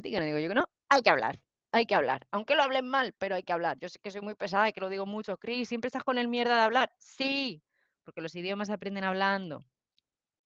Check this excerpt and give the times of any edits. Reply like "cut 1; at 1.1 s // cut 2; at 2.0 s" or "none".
none